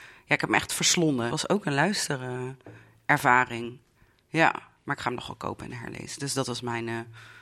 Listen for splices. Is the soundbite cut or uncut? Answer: cut